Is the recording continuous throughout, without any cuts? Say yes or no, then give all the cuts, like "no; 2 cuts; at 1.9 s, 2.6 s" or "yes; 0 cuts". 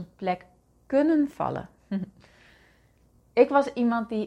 yes; 0 cuts